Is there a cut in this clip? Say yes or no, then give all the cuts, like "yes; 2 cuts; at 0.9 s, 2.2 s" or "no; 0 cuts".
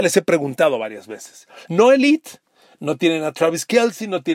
yes; 1 cut; at 1.6 s